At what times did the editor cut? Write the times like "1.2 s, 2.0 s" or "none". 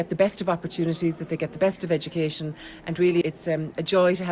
3.2 s